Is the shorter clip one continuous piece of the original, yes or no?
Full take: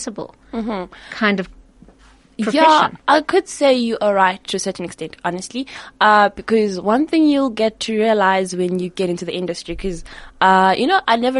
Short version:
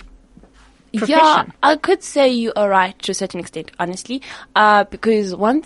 yes